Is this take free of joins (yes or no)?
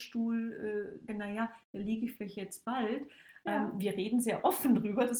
no